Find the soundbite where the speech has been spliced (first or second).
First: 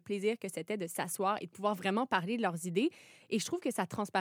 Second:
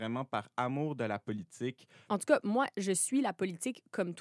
second